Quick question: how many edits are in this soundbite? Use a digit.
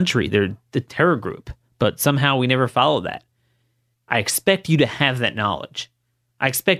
1